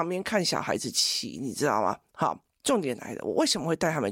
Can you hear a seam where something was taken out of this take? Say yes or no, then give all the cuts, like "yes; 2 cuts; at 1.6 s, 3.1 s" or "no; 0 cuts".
no; 0 cuts